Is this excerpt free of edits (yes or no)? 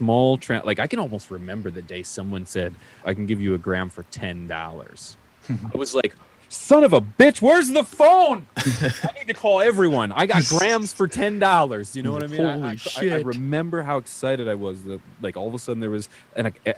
no